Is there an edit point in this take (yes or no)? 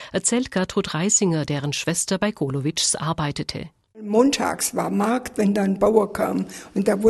no